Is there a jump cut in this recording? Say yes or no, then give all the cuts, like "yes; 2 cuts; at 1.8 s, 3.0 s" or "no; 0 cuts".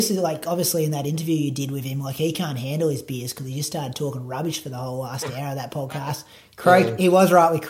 no; 0 cuts